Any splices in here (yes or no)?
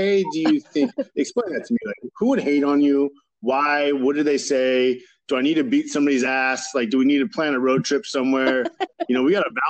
no